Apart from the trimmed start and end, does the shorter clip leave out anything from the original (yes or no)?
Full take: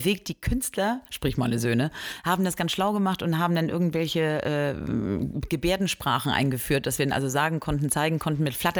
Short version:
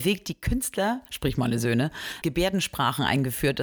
yes